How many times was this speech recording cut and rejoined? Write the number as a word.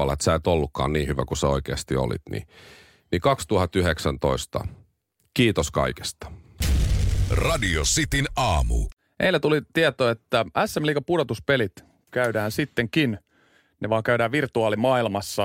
zero